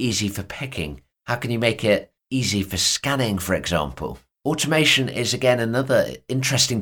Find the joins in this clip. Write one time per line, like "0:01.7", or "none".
none